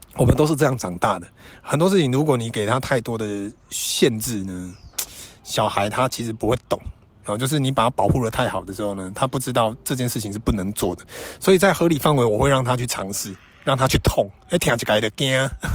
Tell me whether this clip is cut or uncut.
uncut